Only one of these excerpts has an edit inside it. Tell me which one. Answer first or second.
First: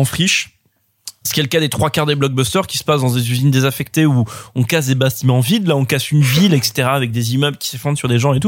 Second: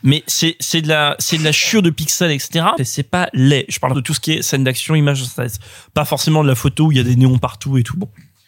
second